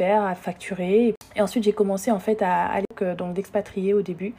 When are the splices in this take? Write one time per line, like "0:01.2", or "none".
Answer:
none